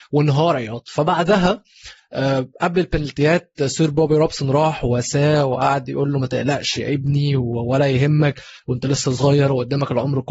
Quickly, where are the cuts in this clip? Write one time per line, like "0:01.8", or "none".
none